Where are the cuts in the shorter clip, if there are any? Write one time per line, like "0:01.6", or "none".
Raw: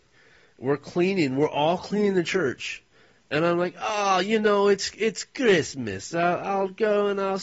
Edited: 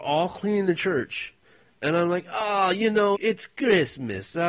0:03.1